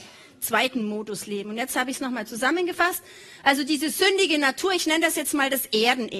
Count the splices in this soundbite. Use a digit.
0